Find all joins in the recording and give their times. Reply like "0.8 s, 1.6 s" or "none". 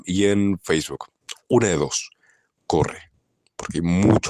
1.3 s